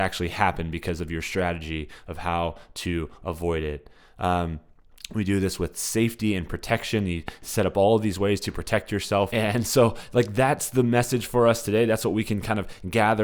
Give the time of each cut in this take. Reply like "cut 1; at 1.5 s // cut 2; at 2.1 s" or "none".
cut 1; at 9.3 s